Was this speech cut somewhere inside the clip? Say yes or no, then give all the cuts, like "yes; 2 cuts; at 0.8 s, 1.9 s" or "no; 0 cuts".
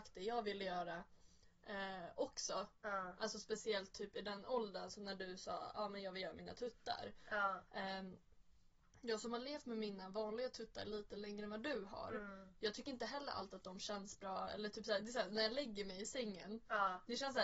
no; 0 cuts